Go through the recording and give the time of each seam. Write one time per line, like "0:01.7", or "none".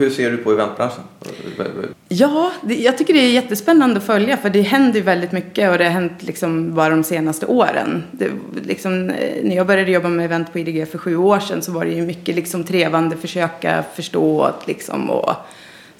0:01.9